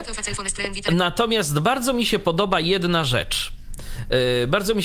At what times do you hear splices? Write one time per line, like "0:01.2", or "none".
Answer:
none